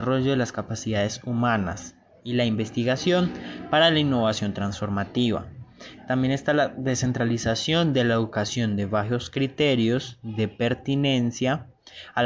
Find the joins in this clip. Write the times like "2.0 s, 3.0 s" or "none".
none

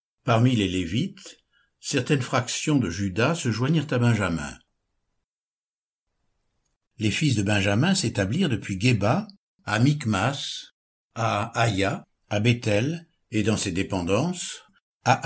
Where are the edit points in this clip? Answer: 6.9 s

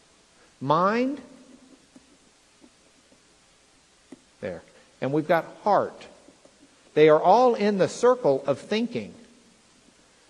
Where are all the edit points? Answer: 6.9 s

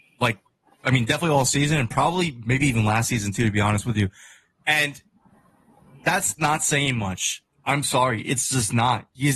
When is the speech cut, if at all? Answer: none

